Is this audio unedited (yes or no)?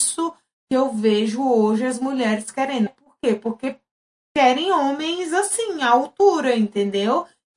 no